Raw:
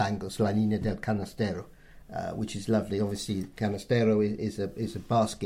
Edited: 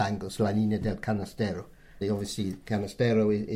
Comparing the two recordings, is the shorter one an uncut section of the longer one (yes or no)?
no